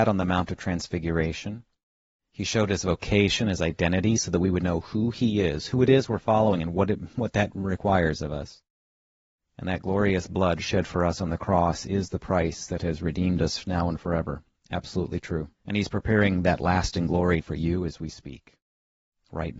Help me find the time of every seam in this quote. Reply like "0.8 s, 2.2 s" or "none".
9.4 s, 15.6 s, 17.4 s

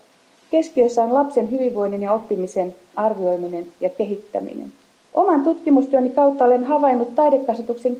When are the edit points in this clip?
2.9 s, 5.0 s

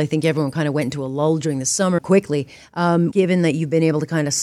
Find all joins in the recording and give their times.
2.0 s, 3.1 s

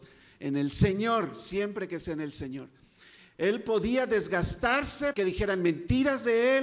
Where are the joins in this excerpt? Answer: 5.1 s

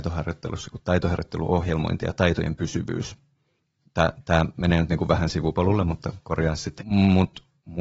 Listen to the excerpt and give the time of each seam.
6.8 s

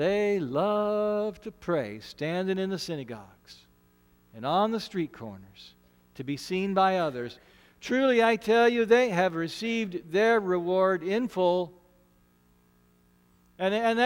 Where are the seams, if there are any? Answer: none

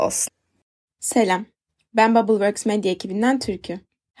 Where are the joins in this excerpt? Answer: none

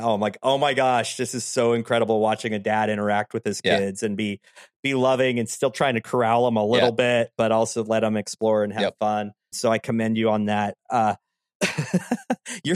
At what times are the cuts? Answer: 9.5 s

